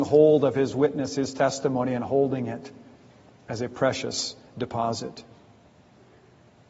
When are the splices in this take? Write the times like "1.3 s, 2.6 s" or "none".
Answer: none